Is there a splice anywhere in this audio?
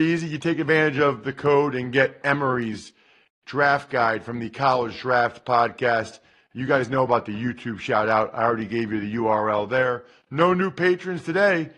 no; 0 cuts

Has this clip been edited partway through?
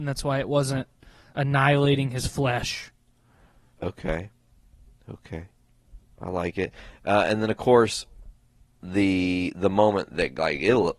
no; 0 cuts

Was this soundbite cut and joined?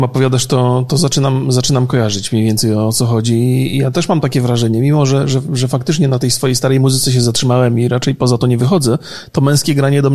no; 0 cuts

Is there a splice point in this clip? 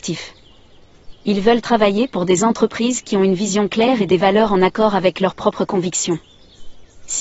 yes; 1 cut; at 1.1 s

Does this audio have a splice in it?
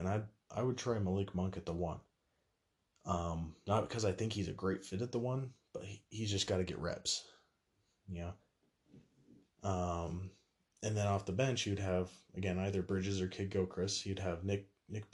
no; 0 cuts

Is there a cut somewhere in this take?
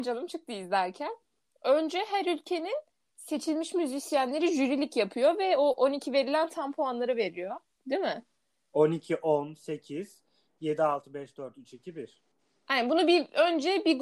no; 0 cuts

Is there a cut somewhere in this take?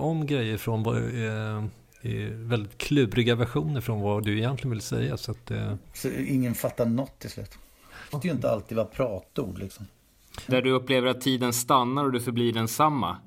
yes; 2 cuts; at 8.1 s, 10.5 s

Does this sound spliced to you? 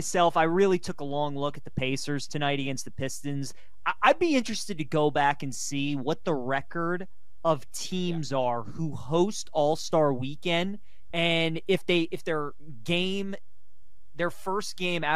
no; 0 cuts

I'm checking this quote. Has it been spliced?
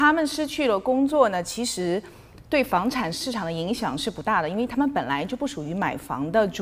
no; 0 cuts

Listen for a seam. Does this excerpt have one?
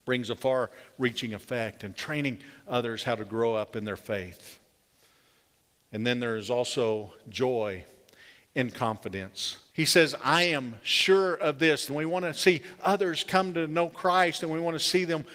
yes; 2 cuts; at 9.7 s, 11.9 s

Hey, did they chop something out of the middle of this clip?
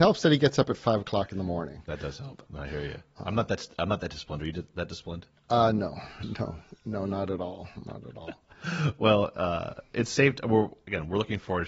yes; 1 cut; at 2.5 s

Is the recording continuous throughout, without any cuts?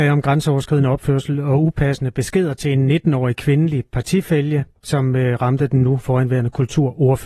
no; 1 cut; at 4.8 s

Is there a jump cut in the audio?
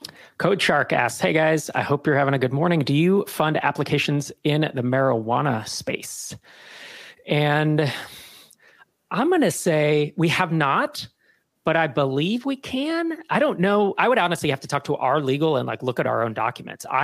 no; 0 cuts

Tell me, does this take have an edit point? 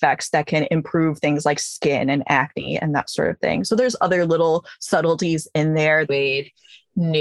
yes; 1 cut; at 6.1 s

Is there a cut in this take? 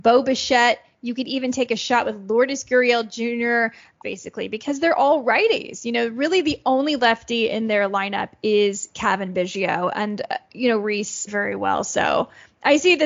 yes; 2 cuts; at 4.0 s, 11.3 s

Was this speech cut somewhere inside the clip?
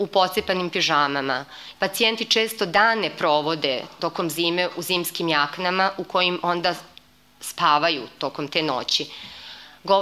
yes; 1 cut; at 1.7 s

